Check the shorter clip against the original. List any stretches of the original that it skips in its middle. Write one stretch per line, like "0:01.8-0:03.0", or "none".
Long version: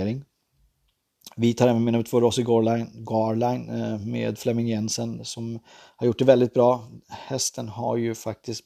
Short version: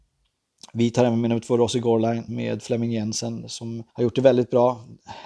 0:02.9-0:04.0
0:05.7-0:05.9